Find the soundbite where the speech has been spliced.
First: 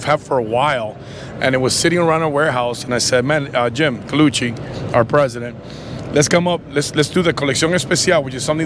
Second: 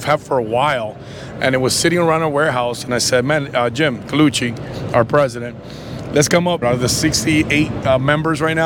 second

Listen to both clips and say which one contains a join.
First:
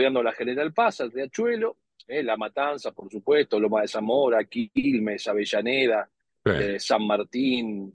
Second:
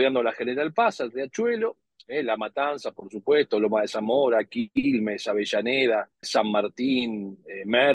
second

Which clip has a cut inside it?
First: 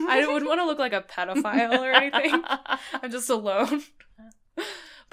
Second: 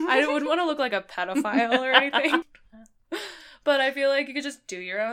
second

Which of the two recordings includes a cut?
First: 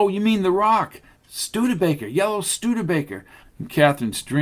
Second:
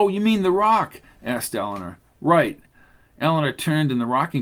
first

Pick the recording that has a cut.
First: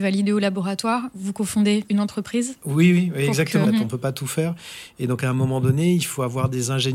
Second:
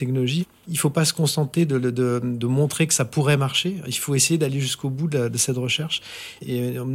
first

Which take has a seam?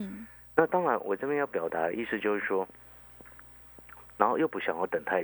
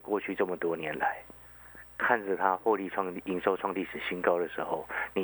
first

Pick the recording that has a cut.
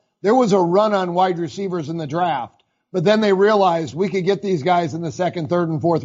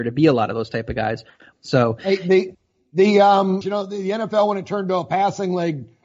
second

